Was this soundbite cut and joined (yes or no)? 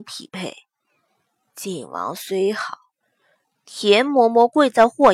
yes